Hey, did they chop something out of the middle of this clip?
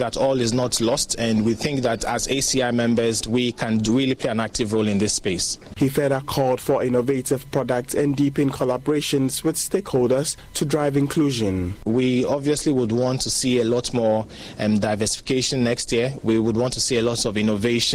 yes; 1 cut; at 3.2 s

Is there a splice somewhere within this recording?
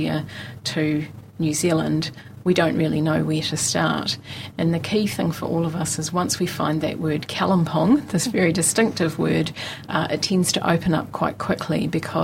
no; 0 cuts

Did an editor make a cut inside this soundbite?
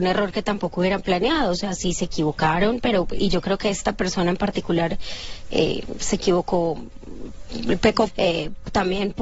yes; 1 cut; at 8.1 s

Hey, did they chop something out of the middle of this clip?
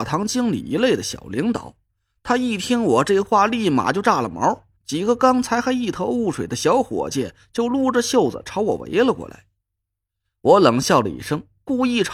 yes; 1 cut; at 4.8 s

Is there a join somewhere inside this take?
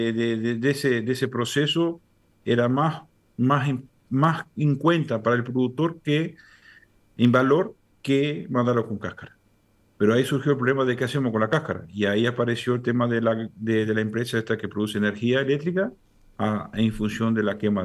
no; 0 cuts

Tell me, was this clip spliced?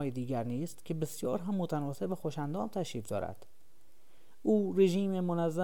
no; 0 cuts

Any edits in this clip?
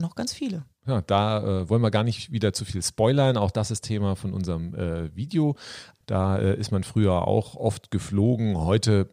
yes; 1 cut; at 6.0 s

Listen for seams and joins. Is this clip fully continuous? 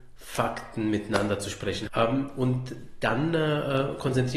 no; 1 cut; at 1.9 s

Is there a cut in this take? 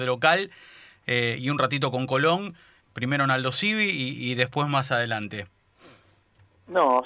yes; 1 cut; at 2.8 s

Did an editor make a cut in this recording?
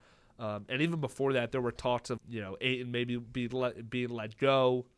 yes; 1 cut; at 2.2 s

